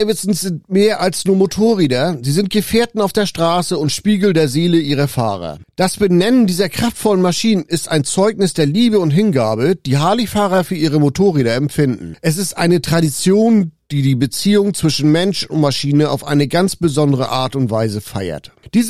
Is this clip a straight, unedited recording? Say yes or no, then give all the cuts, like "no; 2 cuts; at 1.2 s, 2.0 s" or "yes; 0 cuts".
yes; 0 cuts